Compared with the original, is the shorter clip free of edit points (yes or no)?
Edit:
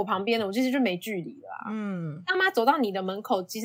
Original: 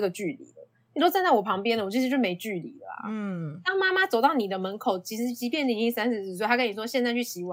no